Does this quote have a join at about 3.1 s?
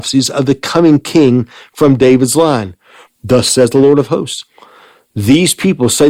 yes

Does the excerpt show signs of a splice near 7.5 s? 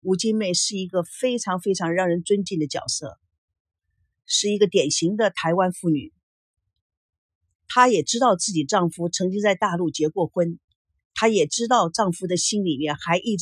no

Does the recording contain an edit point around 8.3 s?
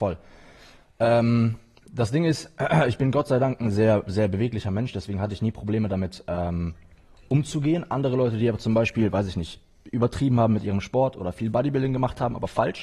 no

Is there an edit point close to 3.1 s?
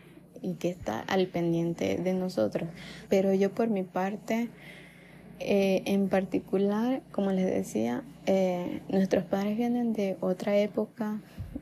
yes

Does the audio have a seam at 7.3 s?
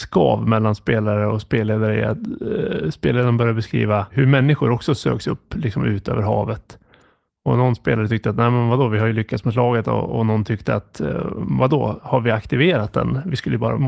no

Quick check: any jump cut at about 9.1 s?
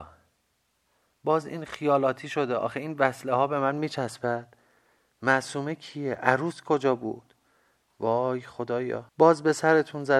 yes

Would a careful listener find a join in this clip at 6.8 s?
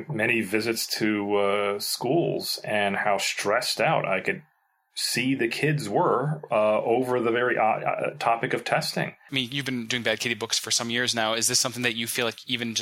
no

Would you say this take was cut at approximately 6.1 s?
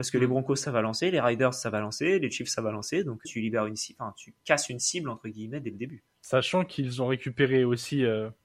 yes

